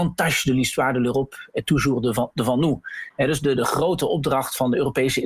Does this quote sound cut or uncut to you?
cut